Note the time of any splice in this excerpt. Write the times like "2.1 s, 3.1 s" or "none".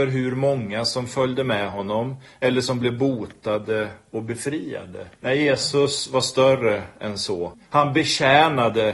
5.1 s, 7.5 s